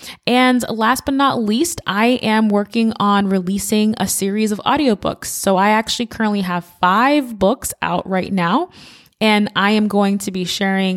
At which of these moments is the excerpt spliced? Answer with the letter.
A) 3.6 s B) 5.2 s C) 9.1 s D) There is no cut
D